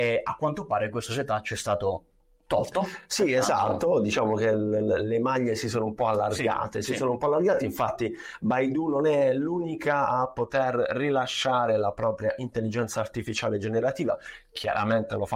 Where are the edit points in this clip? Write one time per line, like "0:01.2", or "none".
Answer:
none